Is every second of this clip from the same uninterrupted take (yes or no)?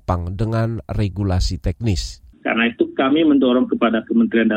no